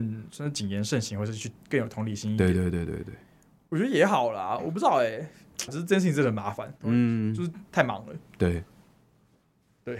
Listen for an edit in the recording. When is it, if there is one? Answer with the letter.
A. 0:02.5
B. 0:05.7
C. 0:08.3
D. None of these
B